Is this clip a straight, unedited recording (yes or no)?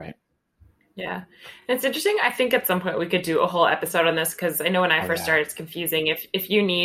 yes